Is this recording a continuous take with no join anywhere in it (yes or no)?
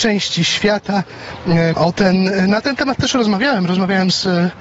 no